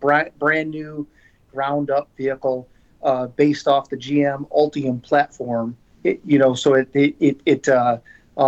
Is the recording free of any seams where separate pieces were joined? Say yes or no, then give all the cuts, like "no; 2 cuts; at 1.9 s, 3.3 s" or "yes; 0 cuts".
yes; 0 cuts